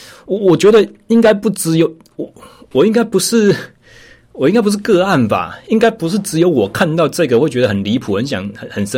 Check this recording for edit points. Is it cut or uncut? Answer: uncut